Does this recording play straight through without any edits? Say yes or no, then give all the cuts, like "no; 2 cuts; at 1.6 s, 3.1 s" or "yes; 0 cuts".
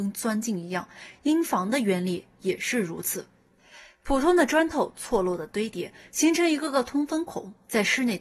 yes; 0 cuts